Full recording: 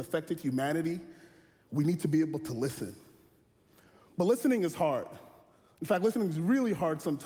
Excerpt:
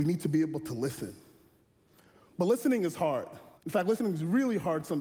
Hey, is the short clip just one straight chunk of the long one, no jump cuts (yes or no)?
no